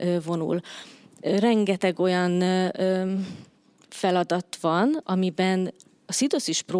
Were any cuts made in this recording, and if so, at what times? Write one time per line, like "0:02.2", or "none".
0:05.0